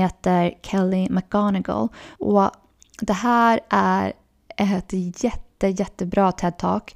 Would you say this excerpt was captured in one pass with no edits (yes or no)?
no